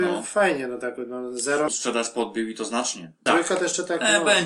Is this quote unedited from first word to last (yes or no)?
no